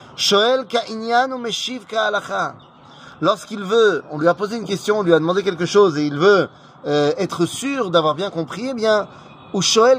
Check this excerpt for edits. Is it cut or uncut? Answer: uncut